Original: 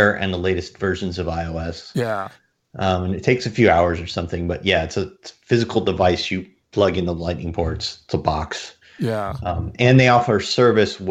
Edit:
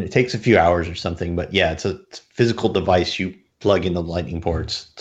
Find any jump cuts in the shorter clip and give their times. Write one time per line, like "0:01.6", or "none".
none